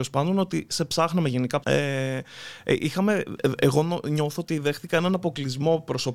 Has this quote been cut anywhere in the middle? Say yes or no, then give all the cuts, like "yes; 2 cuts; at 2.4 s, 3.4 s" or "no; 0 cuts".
yes; 1 cut; at 1.6 s